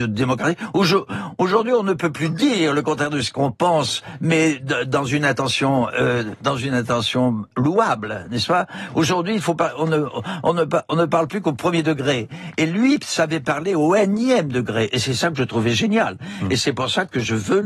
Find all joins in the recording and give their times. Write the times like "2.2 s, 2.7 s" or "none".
none